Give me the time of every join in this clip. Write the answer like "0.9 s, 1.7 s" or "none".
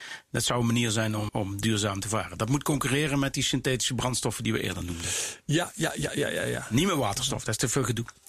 1.3 s